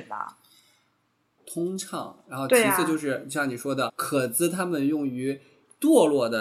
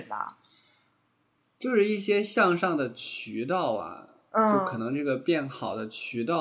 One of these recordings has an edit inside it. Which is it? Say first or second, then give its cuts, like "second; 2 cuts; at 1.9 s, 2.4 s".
first; 2 cuts; at 1.4 s, 3.9 s